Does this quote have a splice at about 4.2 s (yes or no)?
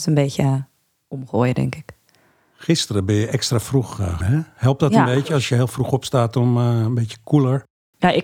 yes